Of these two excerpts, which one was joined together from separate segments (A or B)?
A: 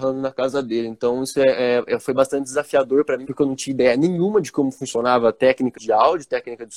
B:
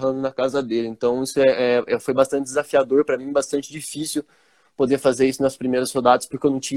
A